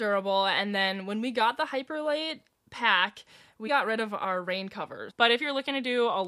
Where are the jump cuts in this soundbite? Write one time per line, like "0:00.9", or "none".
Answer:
0:03.7
0:05.1